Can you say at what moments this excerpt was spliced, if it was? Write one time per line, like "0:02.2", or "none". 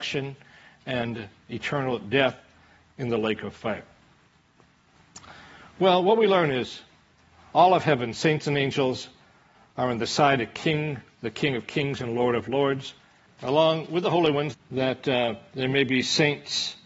0:13.3
0:14.5

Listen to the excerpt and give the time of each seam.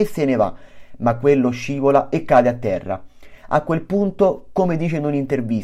none

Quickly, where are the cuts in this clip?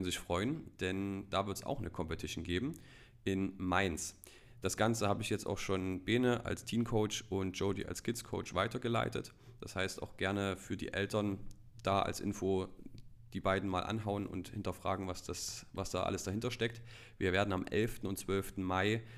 none

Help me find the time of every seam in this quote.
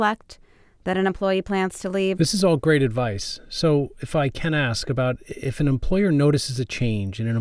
0:02.2

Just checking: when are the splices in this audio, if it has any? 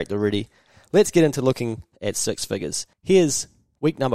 0:02.9

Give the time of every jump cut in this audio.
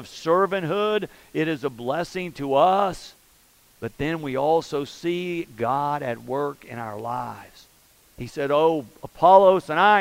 none

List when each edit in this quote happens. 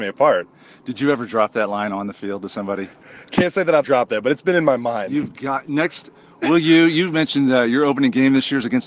0:03.8

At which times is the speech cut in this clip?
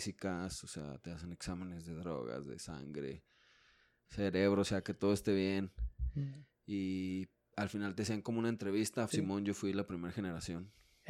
0:09.1

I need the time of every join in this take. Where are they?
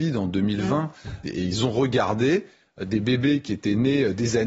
0:01.2

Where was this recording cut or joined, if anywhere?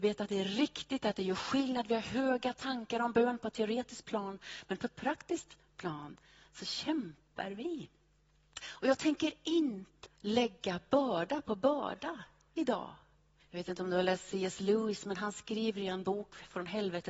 0:08.6
0:10.0
0:13.4

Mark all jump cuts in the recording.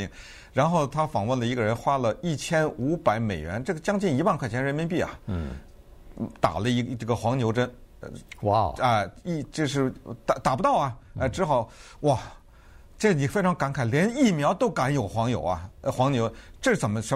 none

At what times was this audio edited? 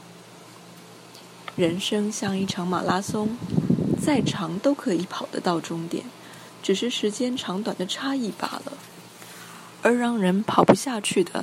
0:01.6

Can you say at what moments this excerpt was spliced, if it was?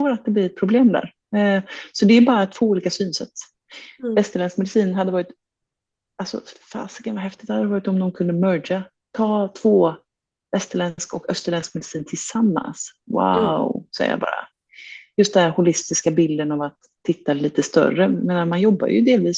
none

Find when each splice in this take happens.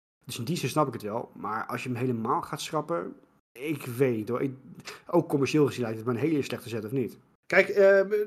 0:07.4

